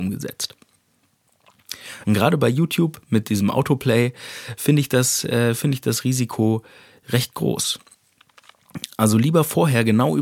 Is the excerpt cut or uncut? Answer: cut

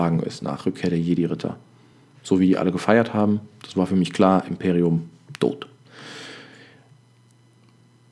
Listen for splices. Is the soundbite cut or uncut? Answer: uncut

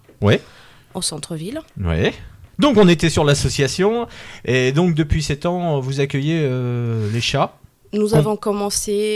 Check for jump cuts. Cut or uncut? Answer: cut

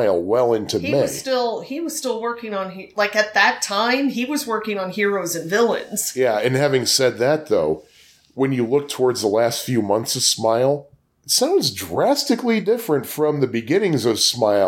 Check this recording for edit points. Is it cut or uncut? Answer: uncut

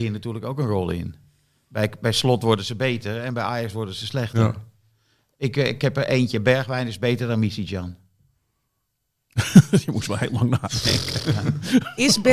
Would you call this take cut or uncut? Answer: uncut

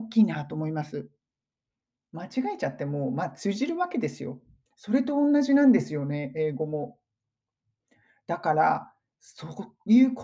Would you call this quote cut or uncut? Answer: cut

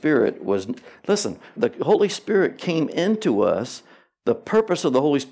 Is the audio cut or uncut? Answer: cut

